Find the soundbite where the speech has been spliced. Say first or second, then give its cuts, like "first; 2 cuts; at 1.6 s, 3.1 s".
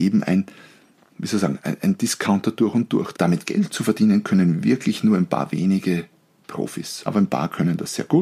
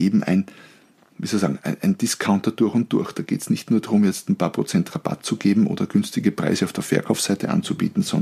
first; 2 cuts; at 3.1 s, 7.1 s